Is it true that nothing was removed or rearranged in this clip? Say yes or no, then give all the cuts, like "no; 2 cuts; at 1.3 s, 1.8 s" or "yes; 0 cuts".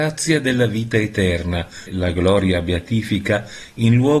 no; 1 cut; at 1.9 s